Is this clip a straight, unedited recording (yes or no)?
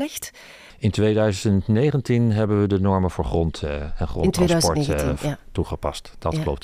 yes